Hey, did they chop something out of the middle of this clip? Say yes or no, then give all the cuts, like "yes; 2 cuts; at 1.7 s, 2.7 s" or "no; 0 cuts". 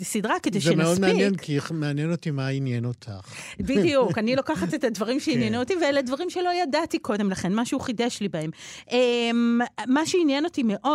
no; 0 cuts